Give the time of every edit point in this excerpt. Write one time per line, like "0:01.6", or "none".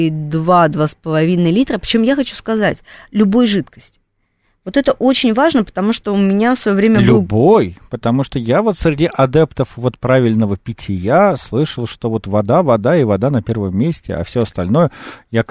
none